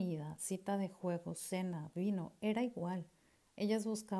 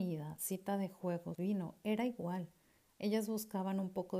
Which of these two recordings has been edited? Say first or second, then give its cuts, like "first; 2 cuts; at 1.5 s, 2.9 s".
second; 1 cut; at 1.3 s